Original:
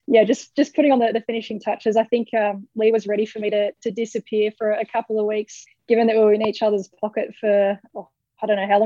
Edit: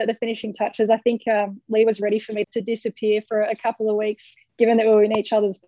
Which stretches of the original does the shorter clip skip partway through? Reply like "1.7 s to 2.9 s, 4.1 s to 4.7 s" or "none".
3.5 s to 3.7 s